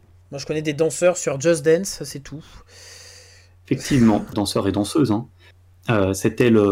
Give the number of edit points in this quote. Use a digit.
1